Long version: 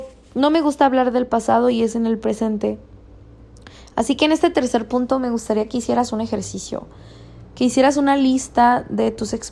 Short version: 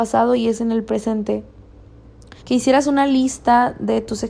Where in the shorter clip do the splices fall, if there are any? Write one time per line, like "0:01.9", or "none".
0:02.4